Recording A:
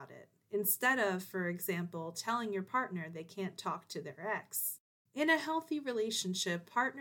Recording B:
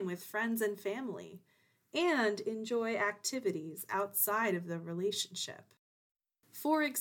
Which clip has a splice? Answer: A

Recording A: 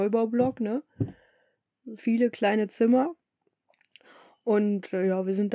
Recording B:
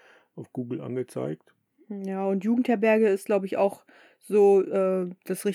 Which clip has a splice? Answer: A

